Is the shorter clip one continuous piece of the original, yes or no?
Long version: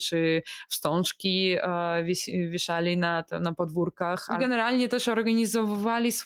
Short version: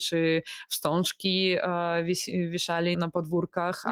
no